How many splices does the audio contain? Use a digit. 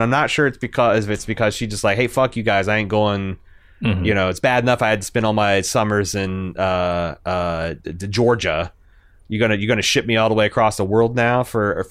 0